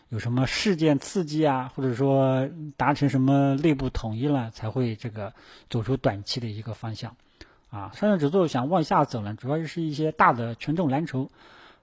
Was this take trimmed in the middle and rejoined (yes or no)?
yes